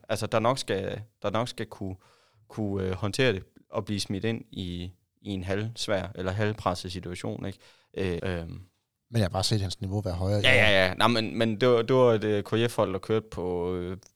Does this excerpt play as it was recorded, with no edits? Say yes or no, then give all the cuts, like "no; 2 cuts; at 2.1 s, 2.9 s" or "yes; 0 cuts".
no; 1 cut; at 8.2 s